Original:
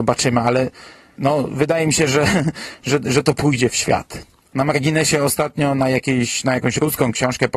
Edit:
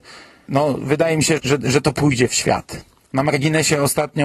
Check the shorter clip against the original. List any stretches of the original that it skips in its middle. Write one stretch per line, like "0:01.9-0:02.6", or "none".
0:02.1-0:02.8

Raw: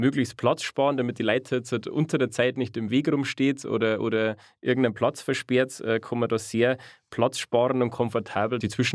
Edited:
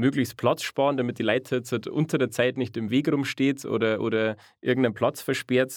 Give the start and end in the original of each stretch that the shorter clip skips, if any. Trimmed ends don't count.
none

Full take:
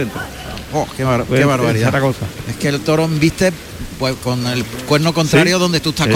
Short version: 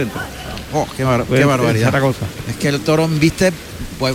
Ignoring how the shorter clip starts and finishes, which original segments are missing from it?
none

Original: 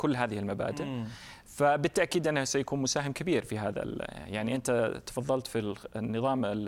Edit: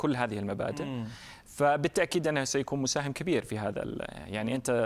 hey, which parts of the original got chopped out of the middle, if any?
none

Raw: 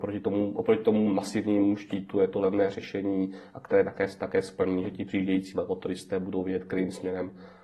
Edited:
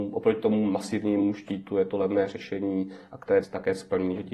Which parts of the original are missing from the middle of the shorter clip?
0:03.8-0:04.1

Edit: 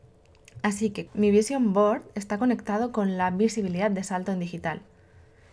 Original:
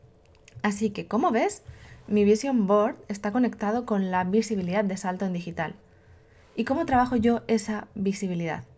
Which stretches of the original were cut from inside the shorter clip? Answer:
0:01.1-0:02.0

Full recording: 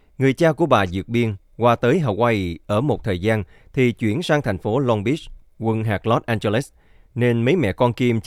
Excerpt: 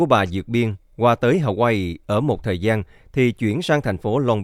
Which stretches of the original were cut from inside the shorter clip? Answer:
none

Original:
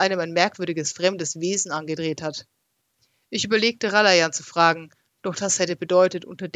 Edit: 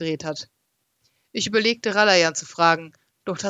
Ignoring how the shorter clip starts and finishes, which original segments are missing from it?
none

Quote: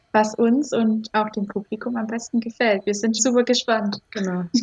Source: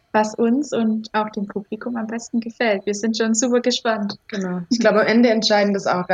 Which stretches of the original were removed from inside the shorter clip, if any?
0:03.2-0:03.3

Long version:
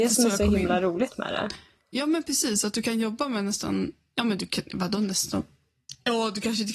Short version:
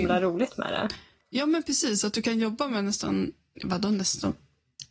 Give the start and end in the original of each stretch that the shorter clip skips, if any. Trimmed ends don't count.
0:04.2-0:04.7

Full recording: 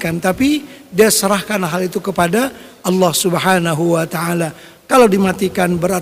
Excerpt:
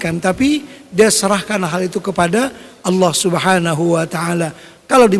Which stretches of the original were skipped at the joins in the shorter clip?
none

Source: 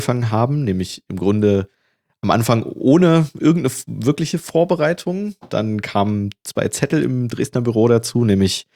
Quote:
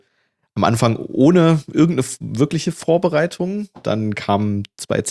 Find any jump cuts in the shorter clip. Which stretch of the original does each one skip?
none

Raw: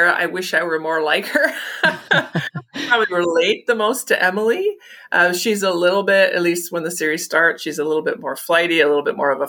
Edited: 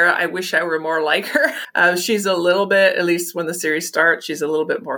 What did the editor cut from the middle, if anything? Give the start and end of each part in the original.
0:01.6-0:05.0

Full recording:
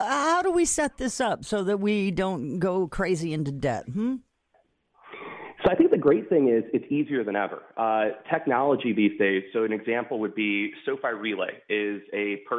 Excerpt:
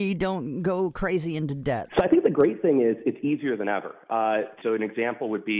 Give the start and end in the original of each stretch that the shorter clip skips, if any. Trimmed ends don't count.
0:03.9-0:05.6
0:08.3-0:09.5

